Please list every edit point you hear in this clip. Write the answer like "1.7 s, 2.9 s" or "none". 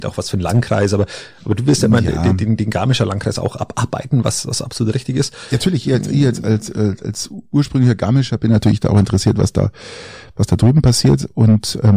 none